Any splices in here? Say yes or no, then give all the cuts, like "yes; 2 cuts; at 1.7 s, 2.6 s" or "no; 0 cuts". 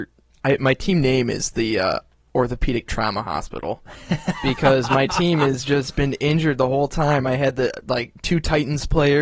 no; 0 cuts